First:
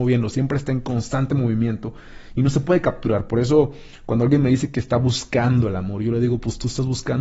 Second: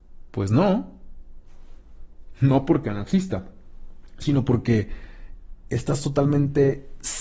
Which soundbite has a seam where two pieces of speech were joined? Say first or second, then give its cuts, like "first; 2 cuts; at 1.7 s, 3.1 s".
second; 1 cut; at 2.3 s